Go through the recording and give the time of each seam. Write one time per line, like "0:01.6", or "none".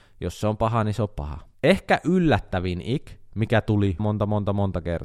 0:04.0